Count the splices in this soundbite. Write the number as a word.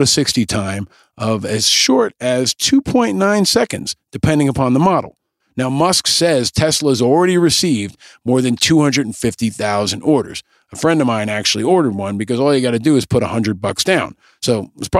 one